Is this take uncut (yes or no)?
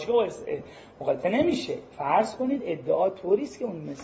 no